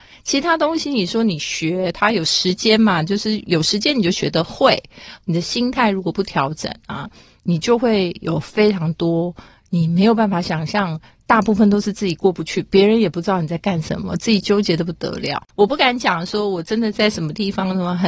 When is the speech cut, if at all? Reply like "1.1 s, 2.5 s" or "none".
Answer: none